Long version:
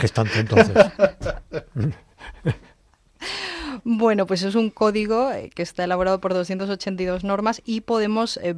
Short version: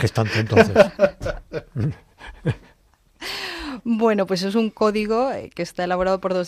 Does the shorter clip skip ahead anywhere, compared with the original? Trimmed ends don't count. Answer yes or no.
no